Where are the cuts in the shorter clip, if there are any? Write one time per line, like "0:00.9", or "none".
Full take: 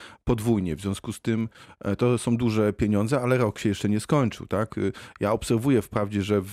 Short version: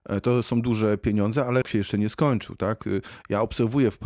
0:01.6